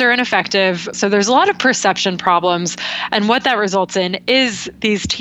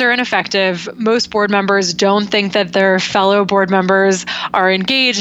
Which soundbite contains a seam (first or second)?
first